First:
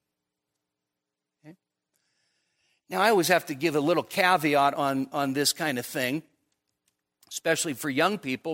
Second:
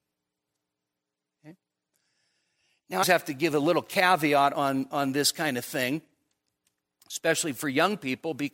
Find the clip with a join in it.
second; 1 cut; at 3.0 s

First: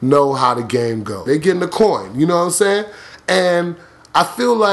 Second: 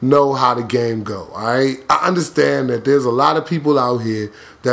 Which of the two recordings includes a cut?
first; 1 cut; at 1.3 s

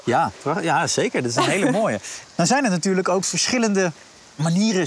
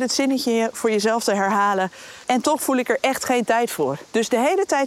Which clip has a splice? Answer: second; 1 cut; at 2.2 s

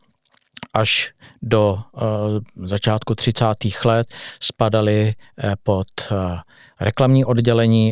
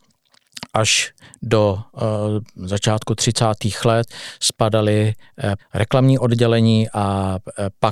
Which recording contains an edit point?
second; 1 cut; at 5.6 s

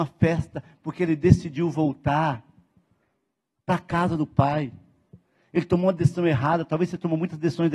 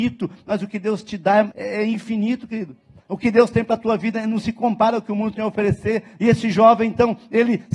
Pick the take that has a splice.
second; 1 cut; at 1.5 s

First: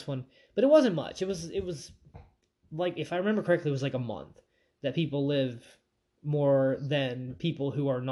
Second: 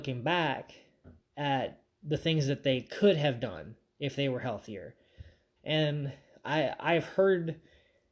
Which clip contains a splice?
second; 1 cut; at 5.6 s

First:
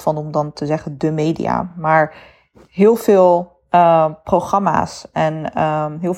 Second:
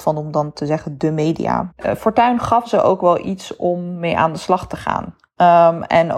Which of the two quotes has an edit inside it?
second; 1 cut; at 1.7 s

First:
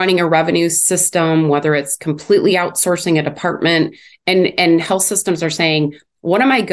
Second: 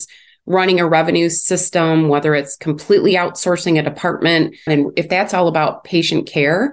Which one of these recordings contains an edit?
second; 1 cut; at 4.7 s

